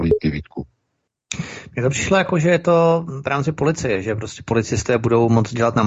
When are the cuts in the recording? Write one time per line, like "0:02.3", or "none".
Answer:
none